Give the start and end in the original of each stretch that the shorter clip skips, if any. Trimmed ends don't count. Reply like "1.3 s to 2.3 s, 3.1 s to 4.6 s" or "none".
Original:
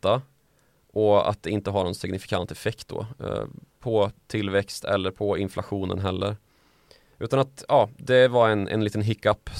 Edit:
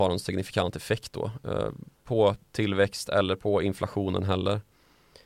none